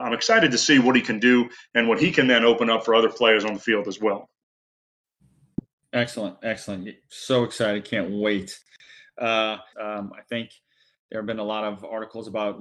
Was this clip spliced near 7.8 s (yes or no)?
no